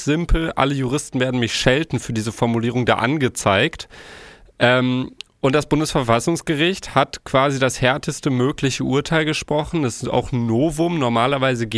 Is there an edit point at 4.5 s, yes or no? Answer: no